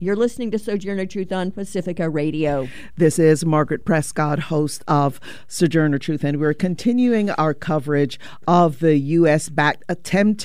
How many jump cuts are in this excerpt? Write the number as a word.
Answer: zero